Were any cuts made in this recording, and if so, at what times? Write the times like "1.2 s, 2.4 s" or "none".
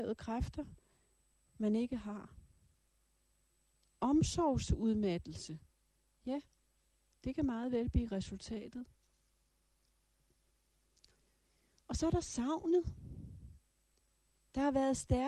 none